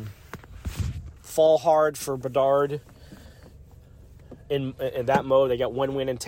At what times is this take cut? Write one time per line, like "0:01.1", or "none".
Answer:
0:01.2